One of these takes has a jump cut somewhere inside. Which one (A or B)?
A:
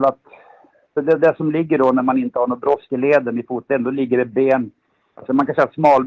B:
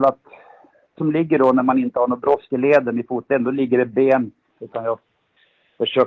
B